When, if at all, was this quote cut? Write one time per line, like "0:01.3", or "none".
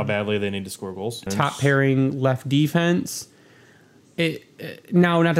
0:01.3